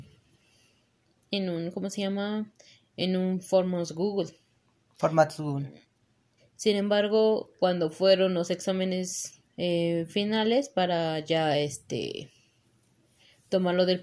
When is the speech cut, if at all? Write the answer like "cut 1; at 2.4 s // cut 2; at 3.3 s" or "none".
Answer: cut 1; at 6.4 s // cut 2; at 9.5 s